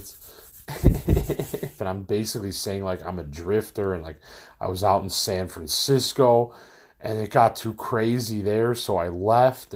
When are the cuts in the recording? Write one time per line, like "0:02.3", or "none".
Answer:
0:01.8